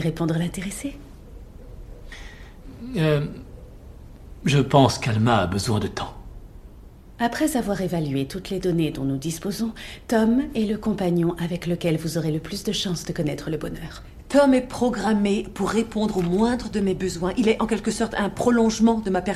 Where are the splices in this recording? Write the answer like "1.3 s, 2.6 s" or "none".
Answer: none